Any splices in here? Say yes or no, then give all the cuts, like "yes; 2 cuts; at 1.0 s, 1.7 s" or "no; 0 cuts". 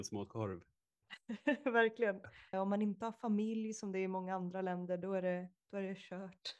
yes; 1 cut; at 2.5 s